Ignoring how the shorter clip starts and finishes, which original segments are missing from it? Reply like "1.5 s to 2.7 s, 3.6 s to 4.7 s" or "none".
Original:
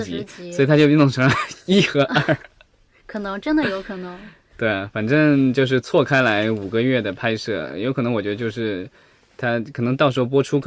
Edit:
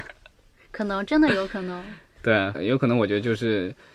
4.9 s to 7.7 s